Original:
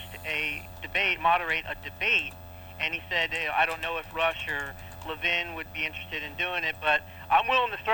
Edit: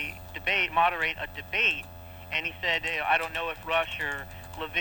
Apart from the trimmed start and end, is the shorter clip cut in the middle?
no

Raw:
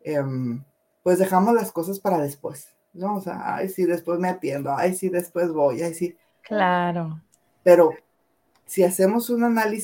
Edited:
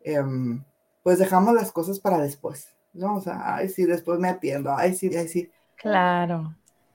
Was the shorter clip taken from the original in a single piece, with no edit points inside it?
no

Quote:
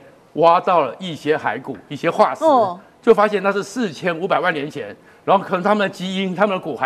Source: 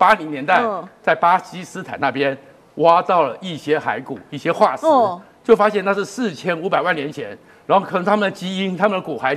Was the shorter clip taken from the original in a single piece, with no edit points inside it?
yes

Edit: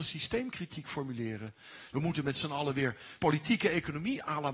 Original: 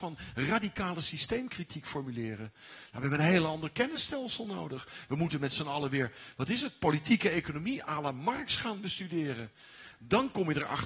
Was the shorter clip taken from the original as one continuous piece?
no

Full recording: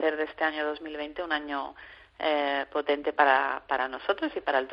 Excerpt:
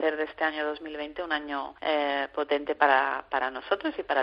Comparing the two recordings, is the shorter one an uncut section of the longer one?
no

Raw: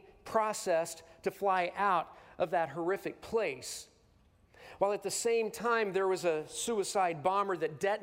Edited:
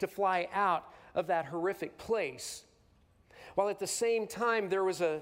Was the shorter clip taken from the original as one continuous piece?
yes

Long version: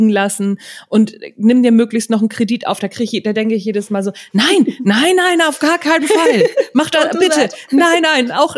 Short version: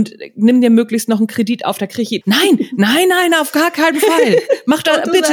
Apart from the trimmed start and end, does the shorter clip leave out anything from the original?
yes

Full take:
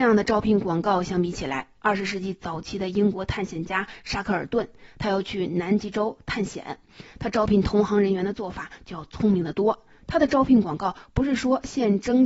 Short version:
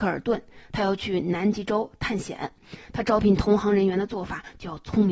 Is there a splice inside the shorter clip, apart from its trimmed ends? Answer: no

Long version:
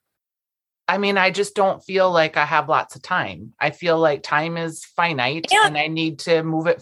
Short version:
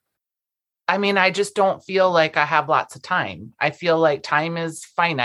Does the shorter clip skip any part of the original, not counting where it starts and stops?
no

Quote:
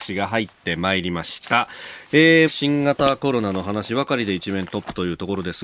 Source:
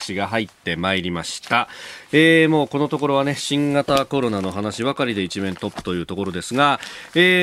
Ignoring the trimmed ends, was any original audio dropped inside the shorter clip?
yes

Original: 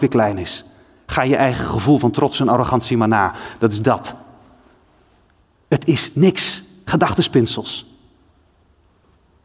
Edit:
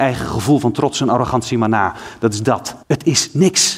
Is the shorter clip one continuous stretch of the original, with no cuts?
no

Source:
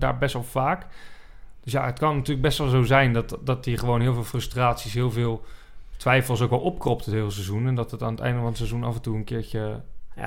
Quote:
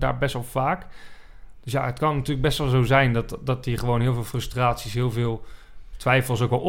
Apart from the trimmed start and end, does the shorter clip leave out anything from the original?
no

